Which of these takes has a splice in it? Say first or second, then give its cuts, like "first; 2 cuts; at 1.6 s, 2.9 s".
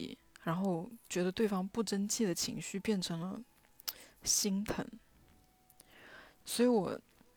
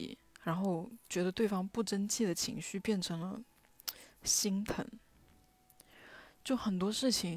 first; 1 cut; at 6.4 s